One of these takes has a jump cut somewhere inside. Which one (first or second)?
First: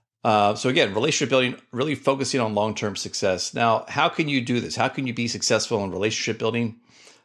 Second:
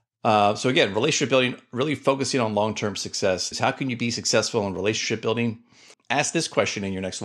second